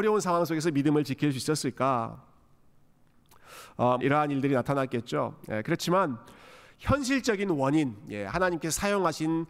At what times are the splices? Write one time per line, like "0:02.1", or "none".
0:04.0